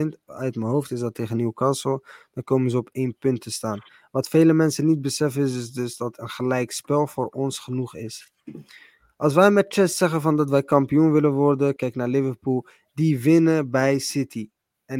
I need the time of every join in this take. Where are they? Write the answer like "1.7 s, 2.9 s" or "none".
11.8 s

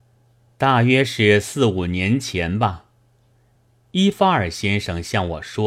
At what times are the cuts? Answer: none

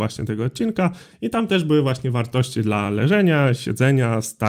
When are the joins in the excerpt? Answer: 1.1 s

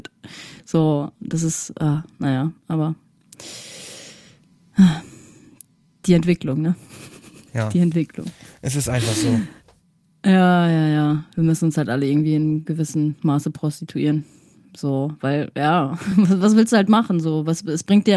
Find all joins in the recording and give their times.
none

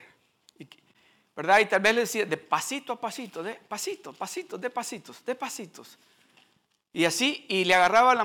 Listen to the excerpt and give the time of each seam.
none

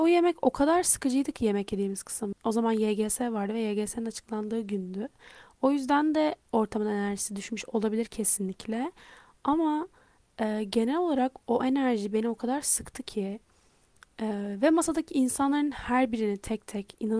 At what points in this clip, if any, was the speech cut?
2.3 s

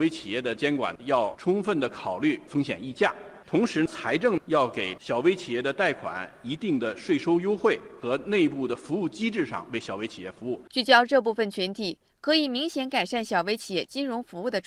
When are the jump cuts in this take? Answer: 8.0 s, 10.7 s

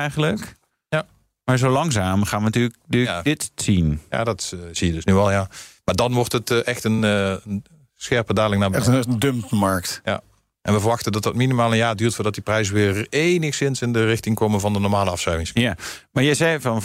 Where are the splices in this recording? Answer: none

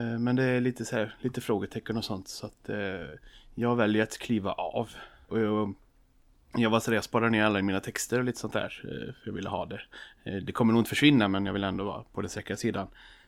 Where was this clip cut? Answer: 5.3 s

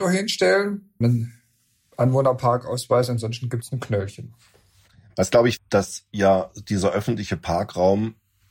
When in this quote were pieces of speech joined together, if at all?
1.0 s, 5.6 s

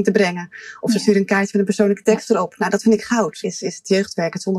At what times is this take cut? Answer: 3.4 s

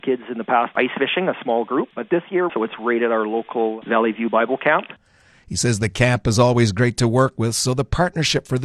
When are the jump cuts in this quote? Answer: 2.5 s

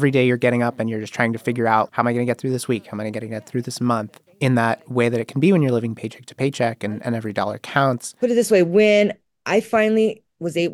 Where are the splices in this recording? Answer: 1.9 s

